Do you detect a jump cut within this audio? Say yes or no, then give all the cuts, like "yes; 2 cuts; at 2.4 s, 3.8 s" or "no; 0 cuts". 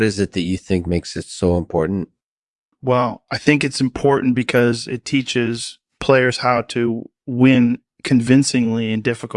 no; 0 cuts